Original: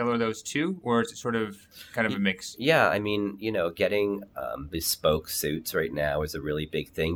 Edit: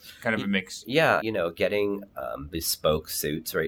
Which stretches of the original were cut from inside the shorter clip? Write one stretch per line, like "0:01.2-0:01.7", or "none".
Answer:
0:02.9-0:03.4